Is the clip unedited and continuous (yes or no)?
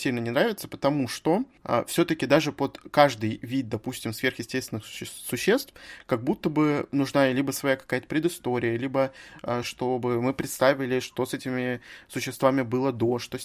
no